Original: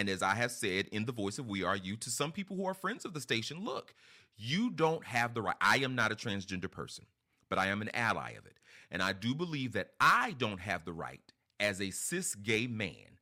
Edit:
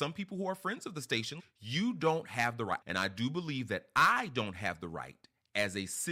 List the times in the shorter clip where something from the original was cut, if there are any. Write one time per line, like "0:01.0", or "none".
0:01.4
0:02.8